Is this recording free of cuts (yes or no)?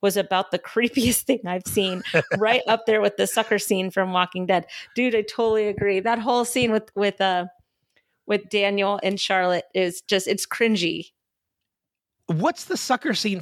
yes